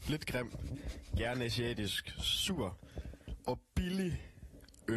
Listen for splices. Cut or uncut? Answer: uncut